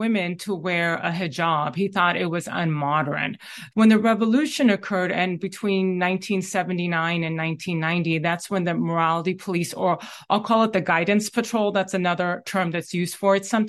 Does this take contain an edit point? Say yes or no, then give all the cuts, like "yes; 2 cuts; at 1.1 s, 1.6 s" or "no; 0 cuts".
yes; 1 cut; at 3.7 s